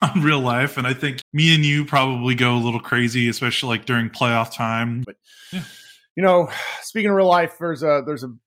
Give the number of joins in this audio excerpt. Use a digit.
2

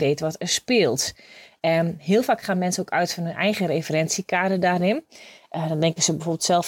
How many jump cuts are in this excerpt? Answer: 0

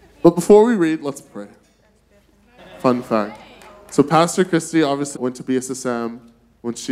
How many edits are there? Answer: 2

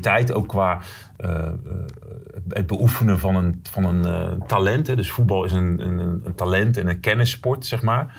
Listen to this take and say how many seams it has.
1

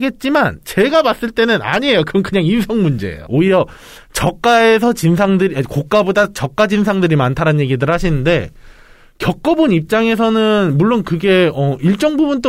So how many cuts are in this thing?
1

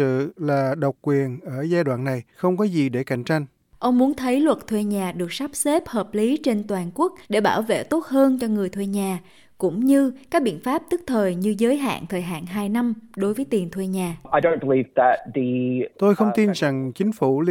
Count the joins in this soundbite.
3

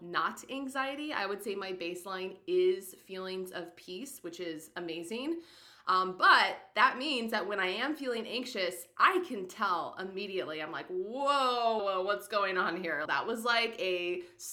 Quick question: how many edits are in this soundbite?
2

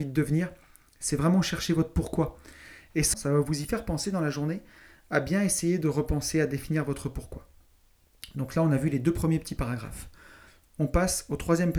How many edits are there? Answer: 1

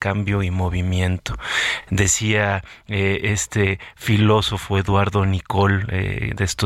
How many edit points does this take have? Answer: 0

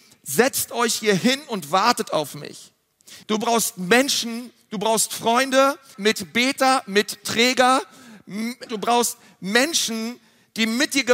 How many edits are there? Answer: 3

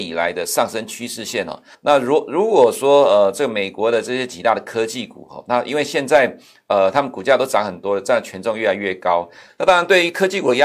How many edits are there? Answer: 2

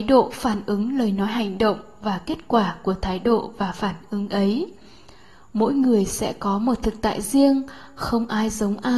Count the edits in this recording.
0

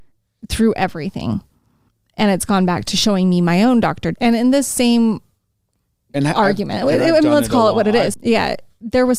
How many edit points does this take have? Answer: 2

